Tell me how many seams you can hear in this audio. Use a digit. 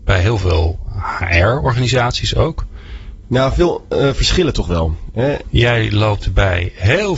2